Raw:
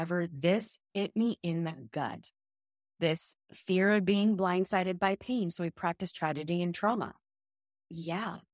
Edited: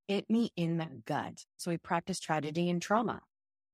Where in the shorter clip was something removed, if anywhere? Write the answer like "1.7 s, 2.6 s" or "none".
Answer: 1.6 s